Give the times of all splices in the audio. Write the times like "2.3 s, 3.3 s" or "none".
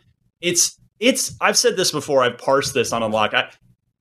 none